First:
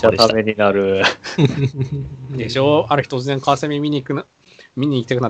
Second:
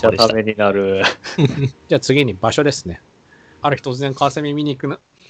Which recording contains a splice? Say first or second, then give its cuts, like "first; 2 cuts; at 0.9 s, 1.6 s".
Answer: second; 2 cuts; at 1.7 s, 3.6 s